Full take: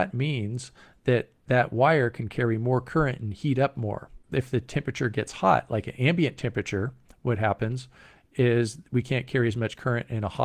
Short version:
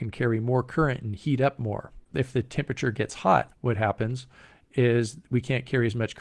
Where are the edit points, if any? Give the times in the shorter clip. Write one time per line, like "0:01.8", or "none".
0:03.5